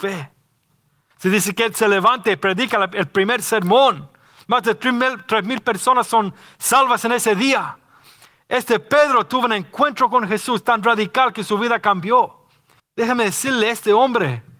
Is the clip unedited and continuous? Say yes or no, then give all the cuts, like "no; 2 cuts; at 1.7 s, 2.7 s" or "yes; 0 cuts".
no; 2 cuts; at 1.1 s, 12.8 s